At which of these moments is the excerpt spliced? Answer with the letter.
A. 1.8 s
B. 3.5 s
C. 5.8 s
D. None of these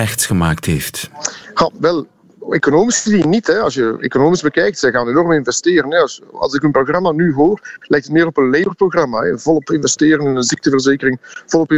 A